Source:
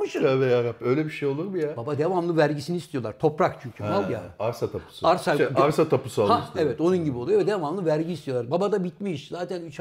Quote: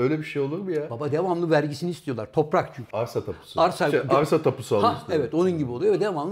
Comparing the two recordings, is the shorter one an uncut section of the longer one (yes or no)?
no